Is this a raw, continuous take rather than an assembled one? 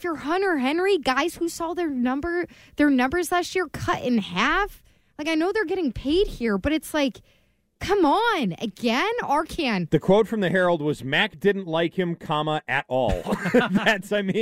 yes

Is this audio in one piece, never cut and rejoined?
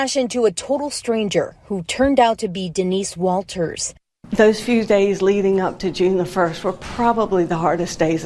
yes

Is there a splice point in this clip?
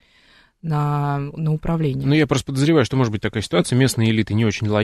no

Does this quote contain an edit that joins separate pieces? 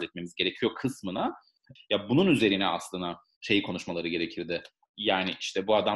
yes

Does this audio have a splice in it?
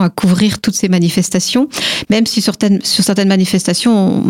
no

